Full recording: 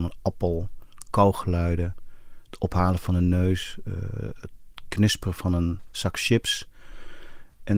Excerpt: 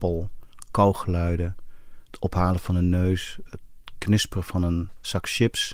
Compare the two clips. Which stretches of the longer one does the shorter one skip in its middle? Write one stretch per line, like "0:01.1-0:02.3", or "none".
0:03.8-0:04.4